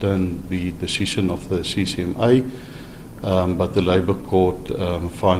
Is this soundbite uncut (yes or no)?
yes